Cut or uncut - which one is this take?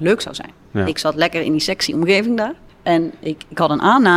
cut